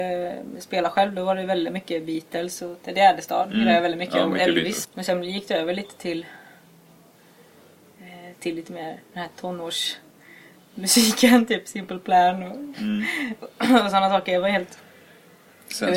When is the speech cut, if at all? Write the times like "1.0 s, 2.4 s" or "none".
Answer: 4.8 s